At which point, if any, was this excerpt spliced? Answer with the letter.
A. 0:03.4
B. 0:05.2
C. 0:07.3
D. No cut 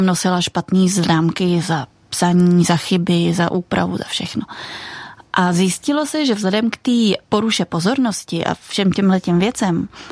C